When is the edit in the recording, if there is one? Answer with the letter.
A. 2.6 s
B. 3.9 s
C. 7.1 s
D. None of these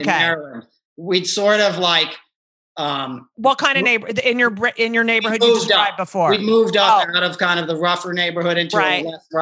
D